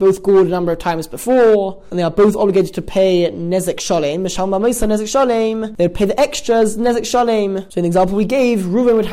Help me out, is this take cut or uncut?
uncut